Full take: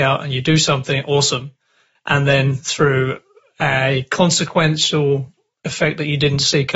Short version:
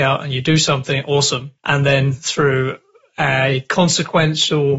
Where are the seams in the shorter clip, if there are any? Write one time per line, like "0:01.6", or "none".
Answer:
0:01.6